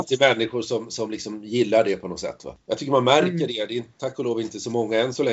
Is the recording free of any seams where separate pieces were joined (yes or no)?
yes